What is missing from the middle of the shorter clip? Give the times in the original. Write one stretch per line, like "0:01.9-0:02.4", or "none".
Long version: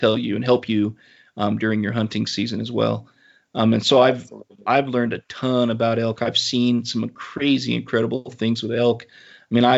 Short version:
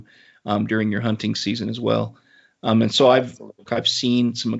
0:04.6-0:06.2